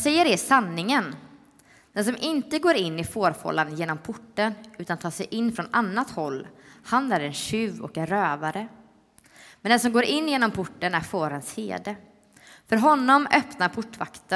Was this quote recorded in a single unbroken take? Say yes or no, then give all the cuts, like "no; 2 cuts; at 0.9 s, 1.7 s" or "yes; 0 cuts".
yes; 0 cuts